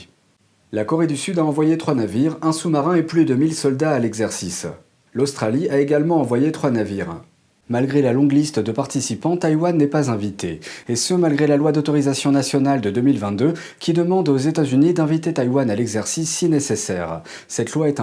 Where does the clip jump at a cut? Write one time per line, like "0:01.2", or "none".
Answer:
none